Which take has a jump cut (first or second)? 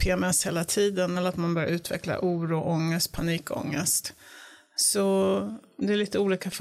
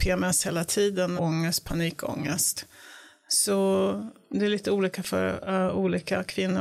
second